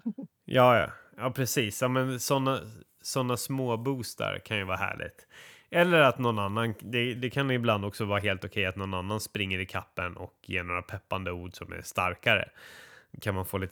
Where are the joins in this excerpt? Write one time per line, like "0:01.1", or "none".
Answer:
0:07.2